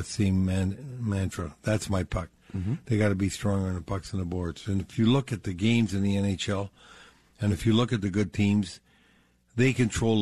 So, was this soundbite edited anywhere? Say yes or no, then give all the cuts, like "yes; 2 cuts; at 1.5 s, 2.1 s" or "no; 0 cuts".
no; 0 cuts